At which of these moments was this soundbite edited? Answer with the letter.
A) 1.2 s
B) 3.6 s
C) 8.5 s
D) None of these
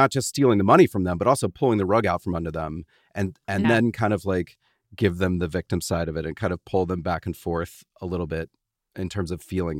B